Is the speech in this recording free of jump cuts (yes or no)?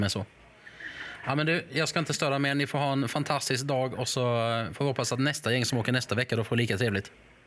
yes